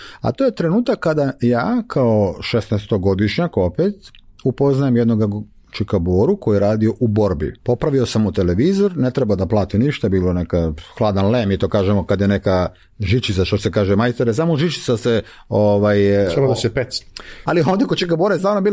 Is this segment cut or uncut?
cut